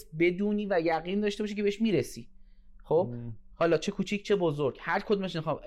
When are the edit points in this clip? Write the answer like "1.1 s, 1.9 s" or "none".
none

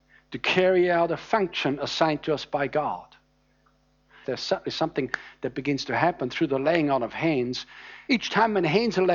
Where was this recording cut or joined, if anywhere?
4.2 s, 8.1 s

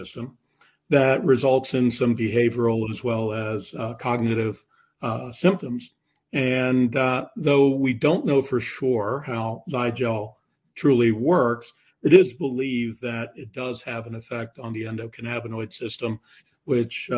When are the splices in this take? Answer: none

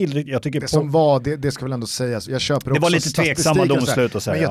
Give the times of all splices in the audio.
2.3 s

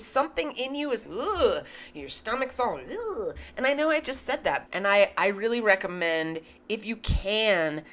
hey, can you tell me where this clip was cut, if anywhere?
1.0 s, 4.7 s

